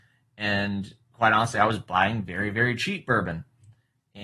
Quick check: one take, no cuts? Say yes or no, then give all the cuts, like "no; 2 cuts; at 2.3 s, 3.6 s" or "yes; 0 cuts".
yes; 0 cuts